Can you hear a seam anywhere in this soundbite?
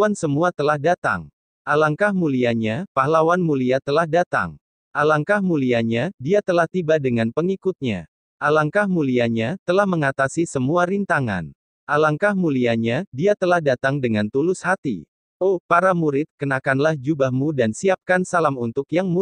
no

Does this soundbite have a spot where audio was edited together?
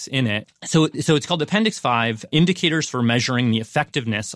yes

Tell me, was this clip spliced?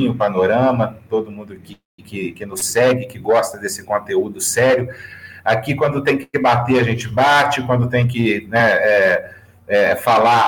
no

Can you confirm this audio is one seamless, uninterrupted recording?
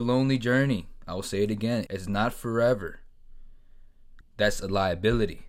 no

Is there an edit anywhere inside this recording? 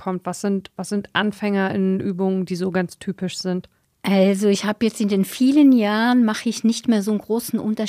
no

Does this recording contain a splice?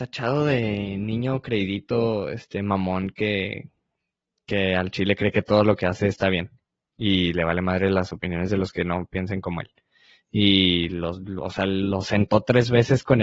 yes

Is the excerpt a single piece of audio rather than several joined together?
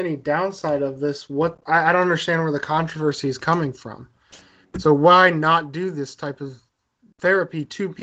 yes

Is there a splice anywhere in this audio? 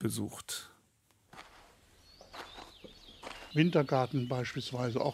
yes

